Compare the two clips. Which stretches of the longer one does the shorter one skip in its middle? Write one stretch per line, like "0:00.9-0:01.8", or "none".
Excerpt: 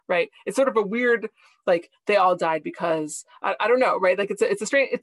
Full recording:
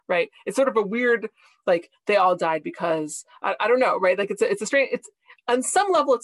none